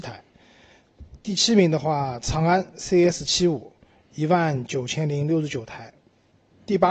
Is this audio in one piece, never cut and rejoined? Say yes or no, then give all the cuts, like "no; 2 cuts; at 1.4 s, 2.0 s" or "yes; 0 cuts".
yes; 0 cuts